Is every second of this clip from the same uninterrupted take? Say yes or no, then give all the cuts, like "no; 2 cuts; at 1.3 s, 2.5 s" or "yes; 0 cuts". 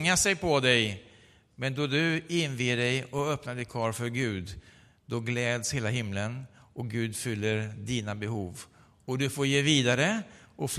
yes; 0 cuts